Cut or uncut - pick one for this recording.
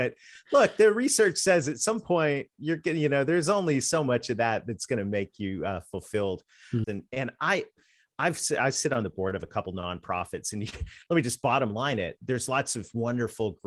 cut